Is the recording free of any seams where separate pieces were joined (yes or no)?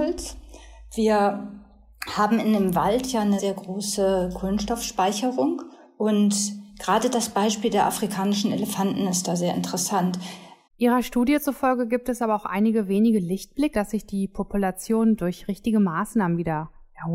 no